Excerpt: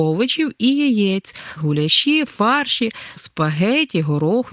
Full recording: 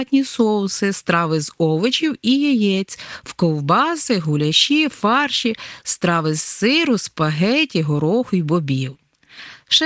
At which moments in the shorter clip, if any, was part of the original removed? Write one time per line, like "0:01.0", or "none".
0:01.6
0:03.2